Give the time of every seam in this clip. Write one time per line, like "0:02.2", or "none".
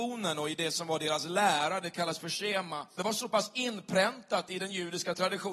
0:03.0